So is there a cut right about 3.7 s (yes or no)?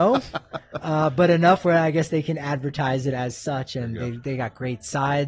no